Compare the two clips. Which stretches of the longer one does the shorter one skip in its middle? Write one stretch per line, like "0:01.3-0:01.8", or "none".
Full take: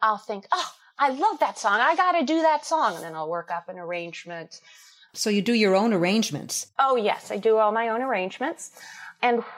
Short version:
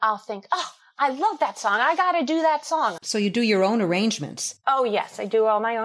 0:03.0-0:05.1